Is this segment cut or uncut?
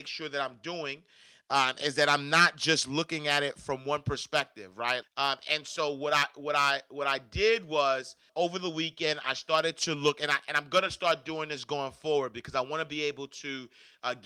cut